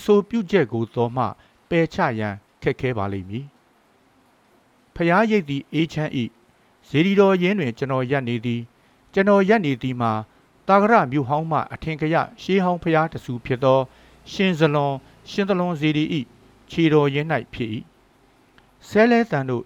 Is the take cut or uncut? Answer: uncut